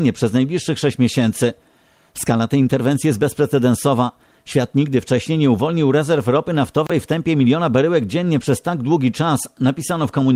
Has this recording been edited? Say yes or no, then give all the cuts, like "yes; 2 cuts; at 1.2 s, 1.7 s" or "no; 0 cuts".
no; 0 cuts